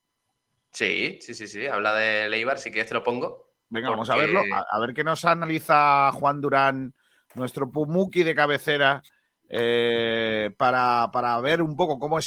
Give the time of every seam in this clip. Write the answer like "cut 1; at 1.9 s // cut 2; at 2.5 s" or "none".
none